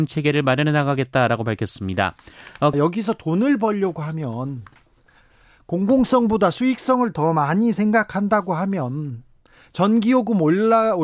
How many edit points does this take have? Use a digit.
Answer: 1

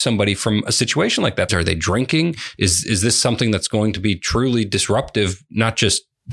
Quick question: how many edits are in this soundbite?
2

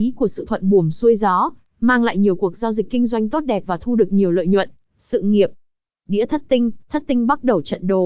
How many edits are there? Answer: 1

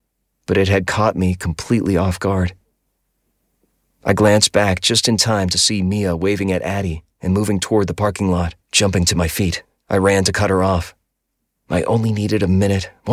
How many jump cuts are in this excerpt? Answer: 1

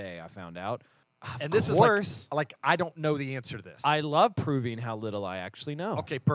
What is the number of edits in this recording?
1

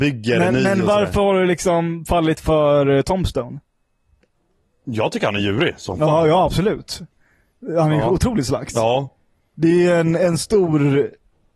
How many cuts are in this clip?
0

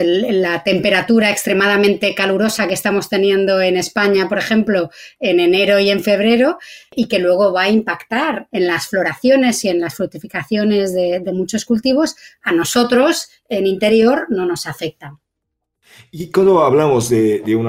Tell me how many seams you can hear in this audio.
0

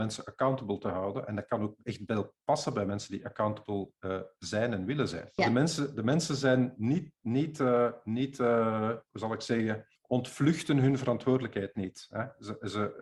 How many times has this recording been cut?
2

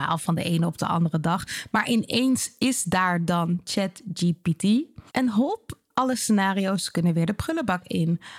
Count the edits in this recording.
1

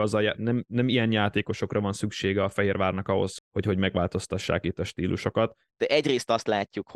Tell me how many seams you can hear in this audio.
2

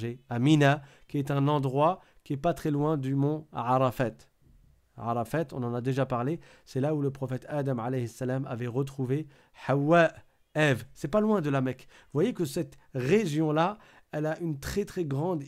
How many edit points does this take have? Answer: 0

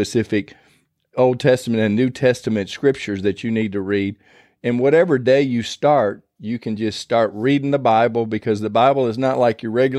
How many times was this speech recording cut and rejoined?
0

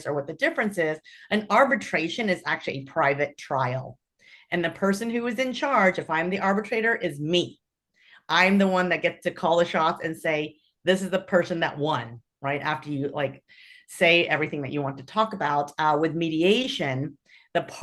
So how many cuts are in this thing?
0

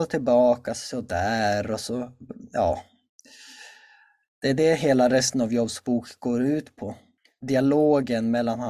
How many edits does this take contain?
0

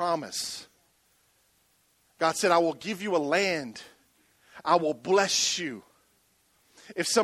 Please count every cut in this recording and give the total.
0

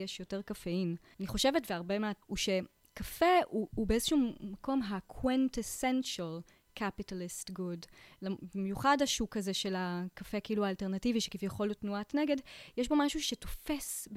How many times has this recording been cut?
2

